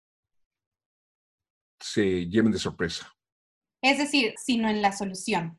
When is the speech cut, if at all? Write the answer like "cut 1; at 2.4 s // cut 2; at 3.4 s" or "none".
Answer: cut 1; at 4.4 s